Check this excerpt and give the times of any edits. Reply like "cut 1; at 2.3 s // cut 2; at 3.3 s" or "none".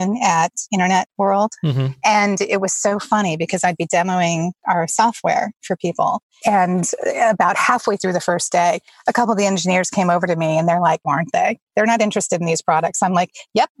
cut 1; at 6.4 s // cut 2; at 11.0 s